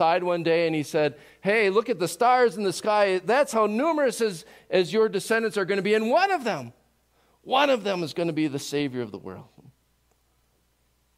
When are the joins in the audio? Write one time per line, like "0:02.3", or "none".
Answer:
none